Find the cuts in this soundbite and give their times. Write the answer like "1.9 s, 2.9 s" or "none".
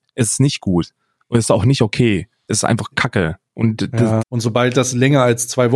4.2 s